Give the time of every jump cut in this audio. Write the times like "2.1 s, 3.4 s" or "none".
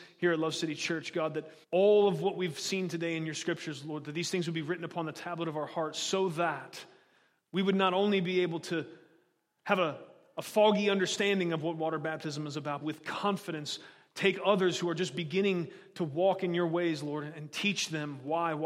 1.6 s, 12.8 s